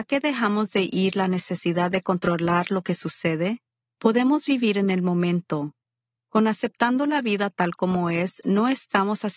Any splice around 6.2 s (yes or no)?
yes